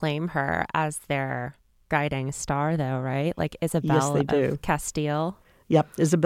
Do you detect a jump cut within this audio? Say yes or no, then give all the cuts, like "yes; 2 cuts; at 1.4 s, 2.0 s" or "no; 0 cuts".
no; 0 cuts